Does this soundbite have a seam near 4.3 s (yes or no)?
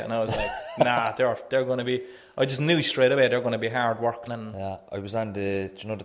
yes